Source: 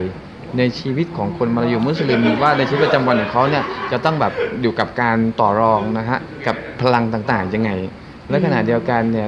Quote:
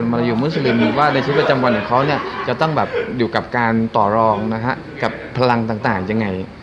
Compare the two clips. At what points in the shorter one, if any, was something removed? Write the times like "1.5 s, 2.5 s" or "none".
none